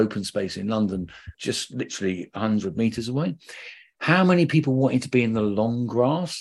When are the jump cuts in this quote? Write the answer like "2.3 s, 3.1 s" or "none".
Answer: 1.3 s